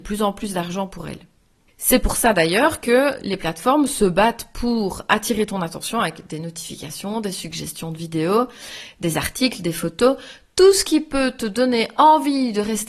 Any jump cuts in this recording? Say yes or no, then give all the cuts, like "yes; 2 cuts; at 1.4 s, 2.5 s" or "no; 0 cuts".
no; 0 cuts